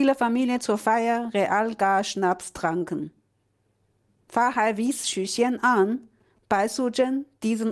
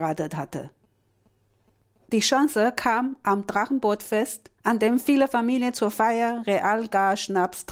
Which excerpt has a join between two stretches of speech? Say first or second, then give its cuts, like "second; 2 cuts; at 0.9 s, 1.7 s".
second; 2 cuts; at 2.0 s, 4.6 s